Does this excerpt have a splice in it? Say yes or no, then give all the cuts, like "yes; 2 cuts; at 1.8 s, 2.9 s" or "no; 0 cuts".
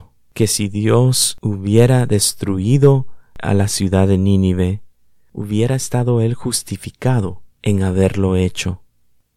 no; 0 cuts